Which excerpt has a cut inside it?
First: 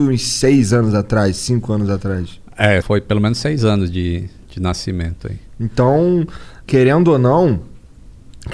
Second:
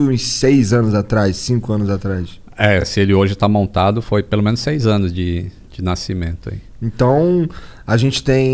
first; 2 cuts; at 2.8 s, 6.6 s

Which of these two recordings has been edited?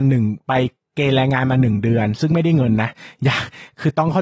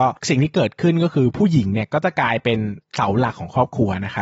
second; 1 cut; at 2.8 s

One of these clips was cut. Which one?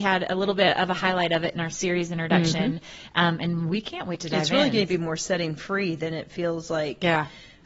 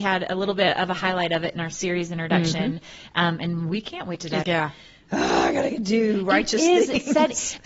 second; 1 cut; at 4.4 s

